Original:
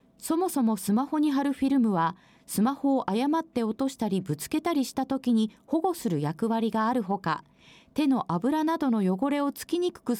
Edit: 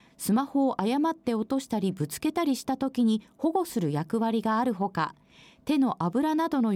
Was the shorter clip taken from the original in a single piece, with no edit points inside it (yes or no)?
yes